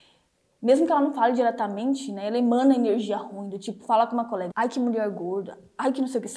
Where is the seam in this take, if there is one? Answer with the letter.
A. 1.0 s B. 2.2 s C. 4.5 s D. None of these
C